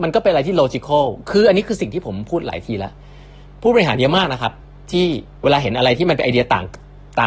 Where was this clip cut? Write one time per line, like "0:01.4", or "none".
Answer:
none